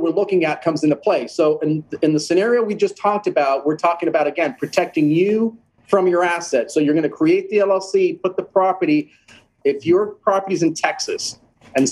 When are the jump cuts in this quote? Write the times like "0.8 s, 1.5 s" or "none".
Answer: 9.6 s